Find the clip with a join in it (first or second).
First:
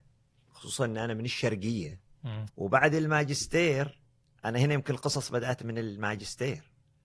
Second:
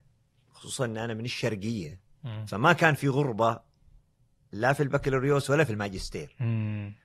first